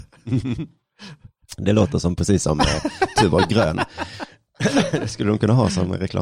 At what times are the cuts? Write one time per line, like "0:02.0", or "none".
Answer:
none